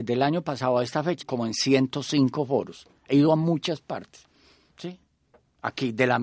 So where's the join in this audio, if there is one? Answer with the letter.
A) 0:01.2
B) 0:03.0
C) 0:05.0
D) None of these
A